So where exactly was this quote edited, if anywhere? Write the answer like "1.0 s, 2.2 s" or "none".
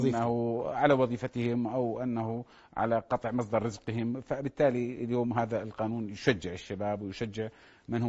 none